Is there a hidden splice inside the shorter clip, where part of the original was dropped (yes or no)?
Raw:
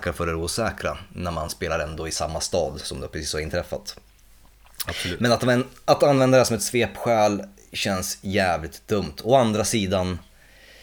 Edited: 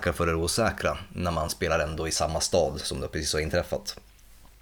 no